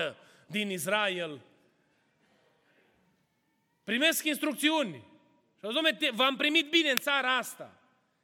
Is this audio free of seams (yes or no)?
yes